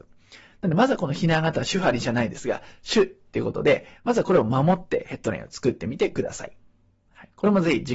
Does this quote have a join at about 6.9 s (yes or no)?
no